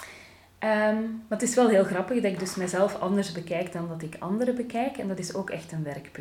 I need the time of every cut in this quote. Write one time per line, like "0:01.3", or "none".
none